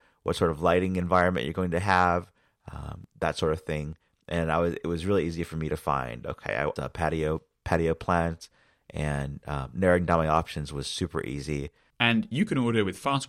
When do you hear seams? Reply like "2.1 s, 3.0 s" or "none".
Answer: 6.8 s, 11.9 s